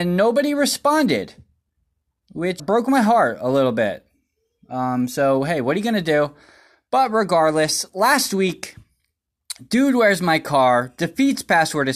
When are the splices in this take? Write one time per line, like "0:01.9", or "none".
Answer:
0:02.6

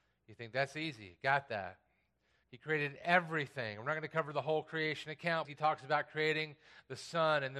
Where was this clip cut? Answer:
0:02.4
0:05.4

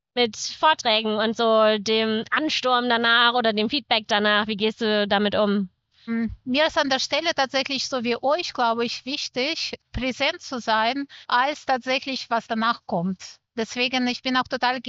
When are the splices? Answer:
0:09.8
0:11.2

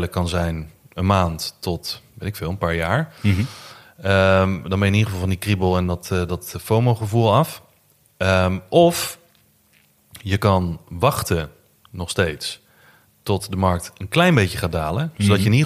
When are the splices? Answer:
none

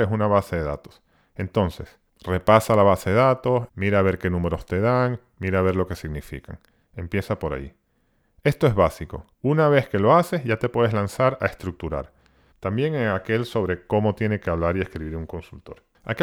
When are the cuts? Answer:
0:03.7
0:09.3
0:12.5

